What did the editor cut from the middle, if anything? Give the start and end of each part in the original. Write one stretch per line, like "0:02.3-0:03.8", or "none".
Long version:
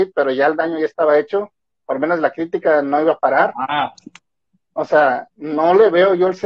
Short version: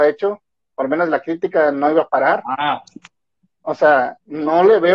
none